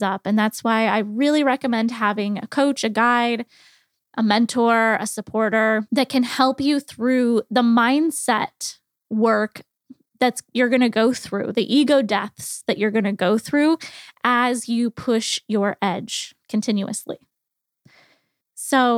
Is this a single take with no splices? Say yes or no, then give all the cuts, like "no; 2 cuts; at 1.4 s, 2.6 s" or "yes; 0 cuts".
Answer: no; 2 cuts; at 5.9 s, 16.4 s